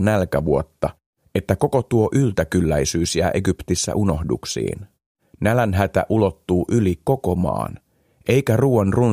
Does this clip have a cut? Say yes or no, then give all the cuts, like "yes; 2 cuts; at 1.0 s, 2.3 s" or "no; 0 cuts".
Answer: no; 0 cuts